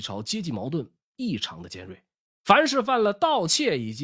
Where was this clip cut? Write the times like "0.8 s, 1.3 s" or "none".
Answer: 2.3 s